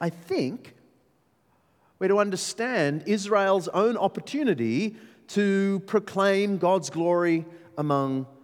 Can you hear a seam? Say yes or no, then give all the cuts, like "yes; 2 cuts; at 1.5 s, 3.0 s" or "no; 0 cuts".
no; 0 cuts